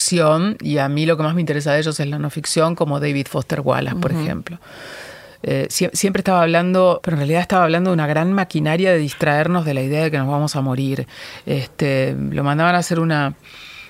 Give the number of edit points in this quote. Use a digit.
2